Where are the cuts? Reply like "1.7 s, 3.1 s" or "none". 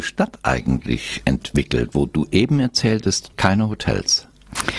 3.3 s